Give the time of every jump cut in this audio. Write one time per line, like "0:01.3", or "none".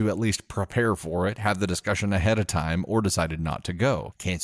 none